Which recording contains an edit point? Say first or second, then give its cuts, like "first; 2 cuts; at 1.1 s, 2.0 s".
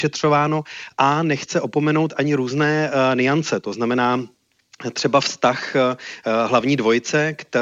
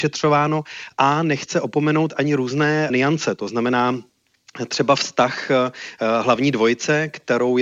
second; 1 cut; at 2.9 s